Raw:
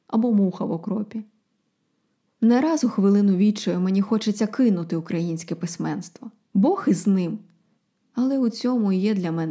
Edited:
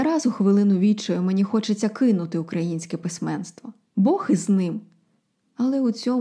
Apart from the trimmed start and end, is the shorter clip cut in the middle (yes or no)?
no